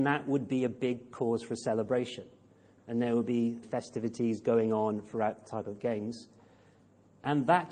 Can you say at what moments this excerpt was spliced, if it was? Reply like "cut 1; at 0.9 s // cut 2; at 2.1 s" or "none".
cut 1; at 3.6 s